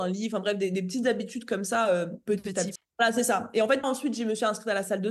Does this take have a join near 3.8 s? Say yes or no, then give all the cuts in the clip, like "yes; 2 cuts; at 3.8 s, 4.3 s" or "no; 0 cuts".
yes; 2 cuts; at 2.8 s, 3.8 s